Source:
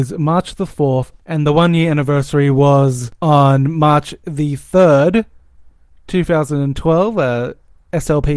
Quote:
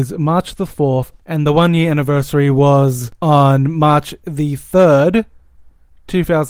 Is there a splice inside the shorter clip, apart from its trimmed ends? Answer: no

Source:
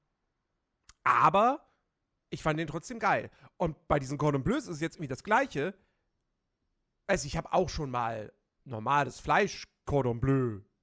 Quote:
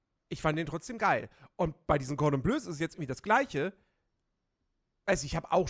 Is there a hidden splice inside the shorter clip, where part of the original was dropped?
no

